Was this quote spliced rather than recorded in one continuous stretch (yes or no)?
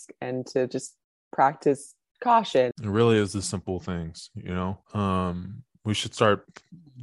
yes